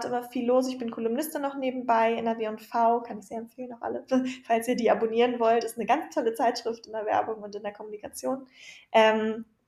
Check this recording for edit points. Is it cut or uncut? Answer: uncut